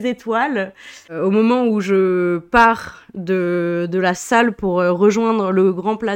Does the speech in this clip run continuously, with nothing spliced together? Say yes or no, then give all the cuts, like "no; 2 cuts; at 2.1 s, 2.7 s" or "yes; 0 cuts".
no; 1 cut; at 1.1 s